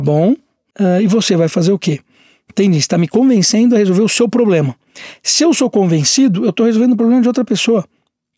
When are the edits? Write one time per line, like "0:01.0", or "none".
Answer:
none